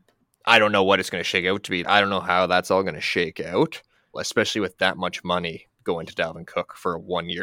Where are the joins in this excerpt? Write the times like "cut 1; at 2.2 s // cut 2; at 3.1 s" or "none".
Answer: cut 1; at 1.8 s // cut 2; at 4.1 s